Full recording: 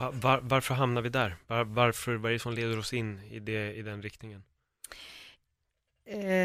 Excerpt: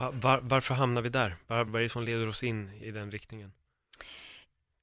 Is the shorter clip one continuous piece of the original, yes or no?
no